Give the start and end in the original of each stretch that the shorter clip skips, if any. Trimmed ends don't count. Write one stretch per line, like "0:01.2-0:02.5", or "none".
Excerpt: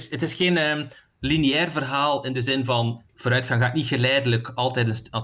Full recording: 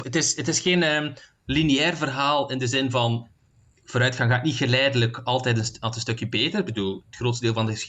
0:03.3-0:03.8